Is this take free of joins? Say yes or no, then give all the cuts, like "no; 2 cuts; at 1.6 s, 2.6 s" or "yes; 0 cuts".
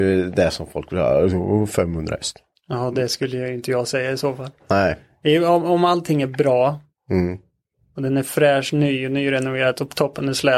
yes; 0 cuts